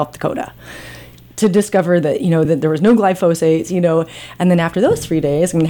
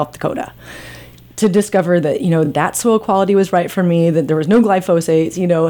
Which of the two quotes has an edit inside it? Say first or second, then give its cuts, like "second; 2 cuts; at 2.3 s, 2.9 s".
first; 1 cut; at 2.4 s